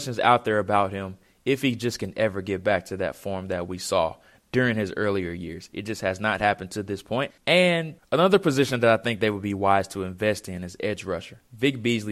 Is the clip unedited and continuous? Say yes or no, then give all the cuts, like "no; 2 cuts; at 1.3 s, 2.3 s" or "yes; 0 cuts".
no; 1 cut; at 7.4 s